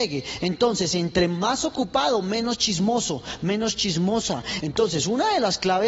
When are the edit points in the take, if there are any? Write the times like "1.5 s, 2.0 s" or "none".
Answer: 4.6 s